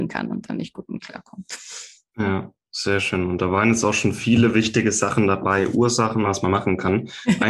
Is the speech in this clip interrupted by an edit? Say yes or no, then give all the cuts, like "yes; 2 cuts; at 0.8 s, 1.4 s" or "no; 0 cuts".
yes; 1 cut; at 6.2 s